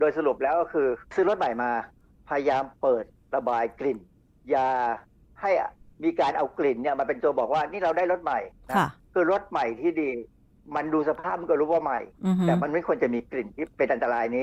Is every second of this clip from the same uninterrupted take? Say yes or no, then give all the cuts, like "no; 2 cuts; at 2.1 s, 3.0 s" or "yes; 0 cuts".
no; 1 cut; at 1.1 s